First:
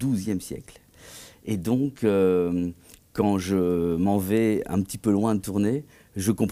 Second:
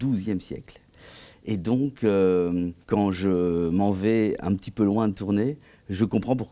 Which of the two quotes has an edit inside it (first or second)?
second